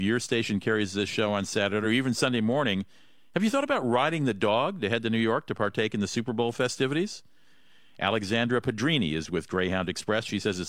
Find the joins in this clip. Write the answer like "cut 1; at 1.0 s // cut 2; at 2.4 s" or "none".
none